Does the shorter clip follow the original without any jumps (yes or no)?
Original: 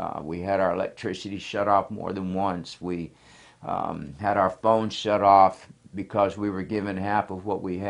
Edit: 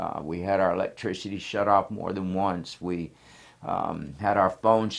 yes